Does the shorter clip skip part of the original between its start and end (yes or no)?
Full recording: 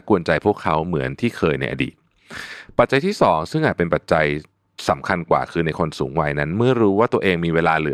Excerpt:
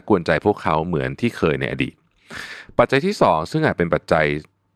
no